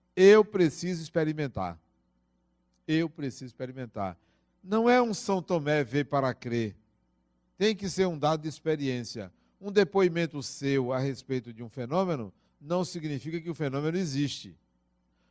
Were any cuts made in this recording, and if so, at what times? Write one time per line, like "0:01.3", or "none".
none